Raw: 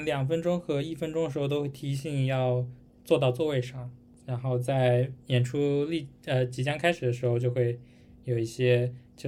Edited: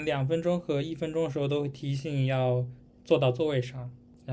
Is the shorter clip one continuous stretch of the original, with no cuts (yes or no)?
yes